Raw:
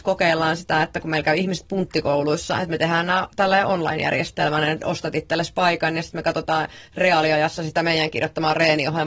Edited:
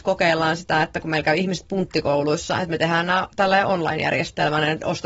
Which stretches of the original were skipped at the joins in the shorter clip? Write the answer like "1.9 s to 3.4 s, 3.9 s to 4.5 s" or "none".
none